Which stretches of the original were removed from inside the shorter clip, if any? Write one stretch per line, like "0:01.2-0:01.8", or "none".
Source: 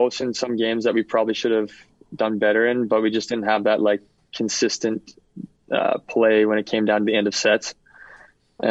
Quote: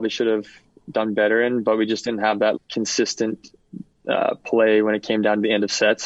0:03.8-0:04.2